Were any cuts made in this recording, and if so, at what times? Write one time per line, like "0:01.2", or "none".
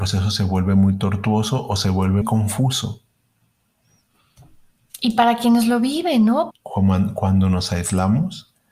0:02.2
0:06.5